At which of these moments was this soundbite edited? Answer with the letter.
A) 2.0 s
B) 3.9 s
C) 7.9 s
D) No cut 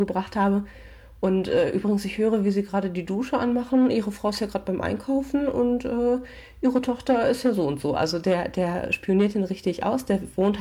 D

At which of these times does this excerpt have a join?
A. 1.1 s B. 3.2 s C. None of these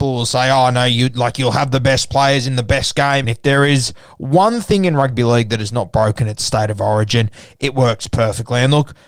B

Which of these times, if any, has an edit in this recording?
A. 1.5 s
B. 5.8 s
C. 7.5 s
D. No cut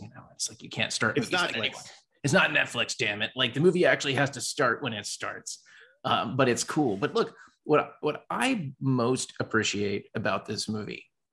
A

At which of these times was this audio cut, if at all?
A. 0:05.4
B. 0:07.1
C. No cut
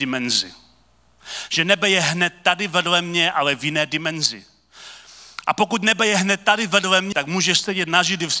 B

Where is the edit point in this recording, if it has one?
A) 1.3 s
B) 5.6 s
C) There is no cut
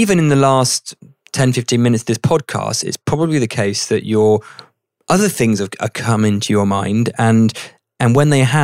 C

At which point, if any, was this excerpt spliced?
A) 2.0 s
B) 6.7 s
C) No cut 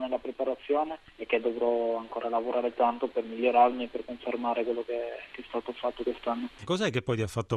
B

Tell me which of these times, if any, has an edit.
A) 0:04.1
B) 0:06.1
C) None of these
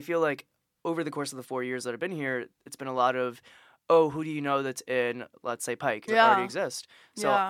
B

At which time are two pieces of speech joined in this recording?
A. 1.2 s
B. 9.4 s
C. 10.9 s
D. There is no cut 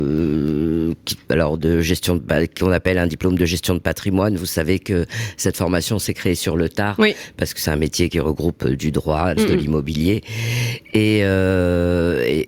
B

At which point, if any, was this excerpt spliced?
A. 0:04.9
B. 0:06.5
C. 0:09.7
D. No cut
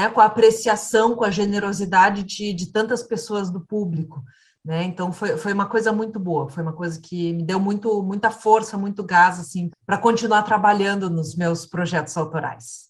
C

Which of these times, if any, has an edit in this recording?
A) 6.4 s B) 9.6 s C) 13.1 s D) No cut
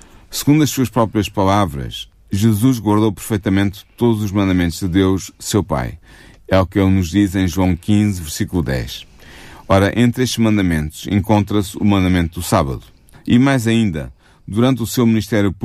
C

